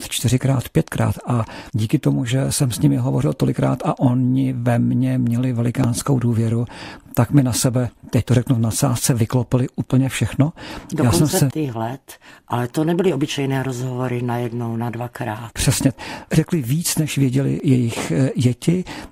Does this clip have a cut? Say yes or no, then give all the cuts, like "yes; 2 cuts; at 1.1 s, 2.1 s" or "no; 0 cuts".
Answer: yes; 2 cuts; at 11.5 s, 15.5 s